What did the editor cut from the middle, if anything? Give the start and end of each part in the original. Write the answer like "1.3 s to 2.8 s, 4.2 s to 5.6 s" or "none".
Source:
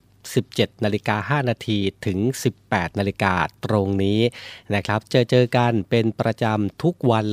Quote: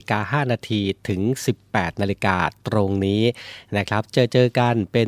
none